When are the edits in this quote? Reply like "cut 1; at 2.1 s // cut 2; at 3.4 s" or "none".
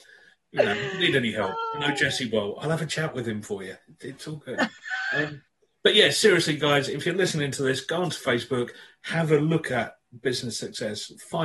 none